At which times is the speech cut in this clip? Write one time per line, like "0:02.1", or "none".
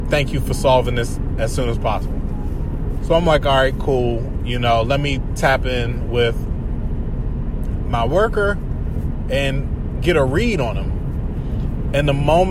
none